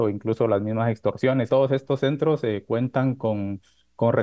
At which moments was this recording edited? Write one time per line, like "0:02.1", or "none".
0:01.5